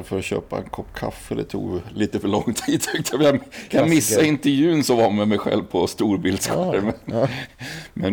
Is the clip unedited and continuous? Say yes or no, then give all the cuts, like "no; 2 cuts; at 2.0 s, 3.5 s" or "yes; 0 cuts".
yes; 0 cuts